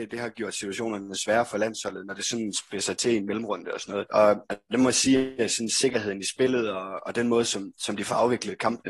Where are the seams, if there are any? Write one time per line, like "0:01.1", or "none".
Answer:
none